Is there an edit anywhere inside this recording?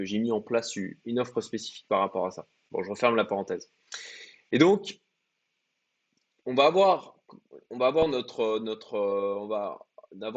no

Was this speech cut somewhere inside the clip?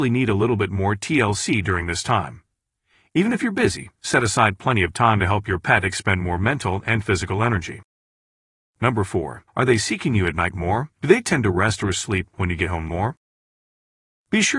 yes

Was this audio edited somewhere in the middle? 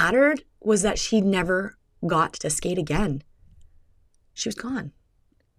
no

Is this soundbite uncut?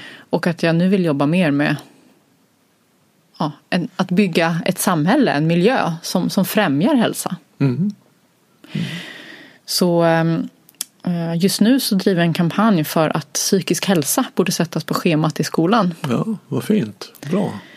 yes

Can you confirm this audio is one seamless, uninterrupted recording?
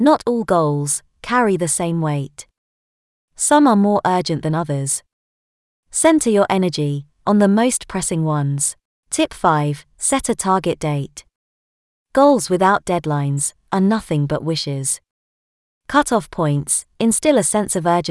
no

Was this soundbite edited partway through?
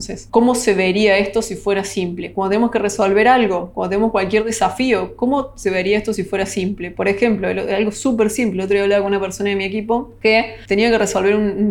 no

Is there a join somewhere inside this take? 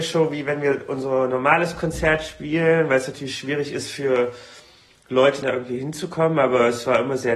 yes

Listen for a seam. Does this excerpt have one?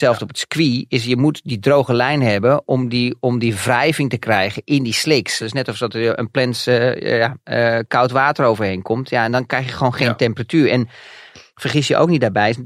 yes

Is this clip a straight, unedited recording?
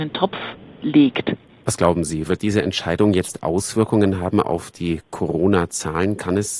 no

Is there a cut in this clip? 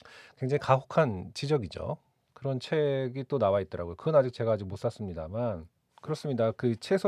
no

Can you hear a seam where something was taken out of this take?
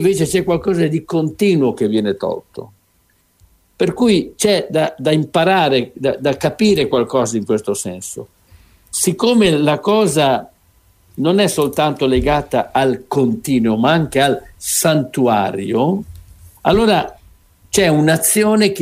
no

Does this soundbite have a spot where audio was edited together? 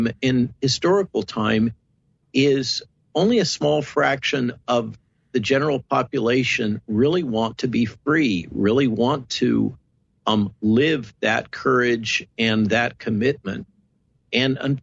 no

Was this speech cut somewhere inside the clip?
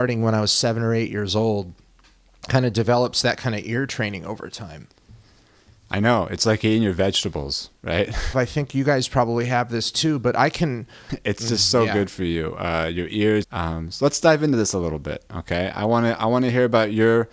yes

